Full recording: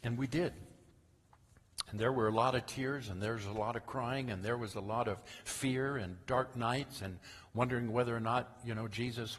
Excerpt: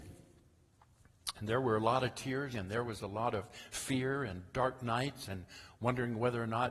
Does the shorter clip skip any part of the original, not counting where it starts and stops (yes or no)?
yes